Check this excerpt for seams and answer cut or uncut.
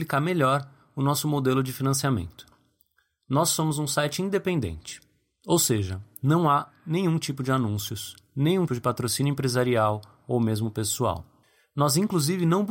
cut